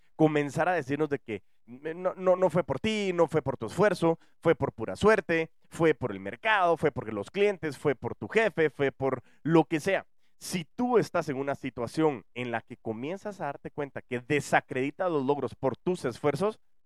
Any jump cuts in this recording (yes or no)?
no